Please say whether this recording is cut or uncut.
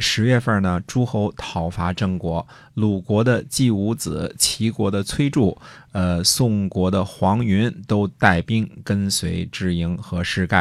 uncut